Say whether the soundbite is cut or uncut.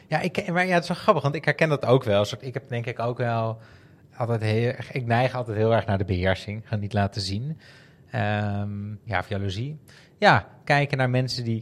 cut